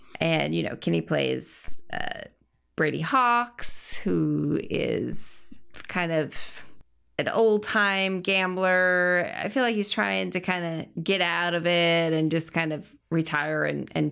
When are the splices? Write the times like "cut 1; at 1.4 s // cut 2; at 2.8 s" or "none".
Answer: none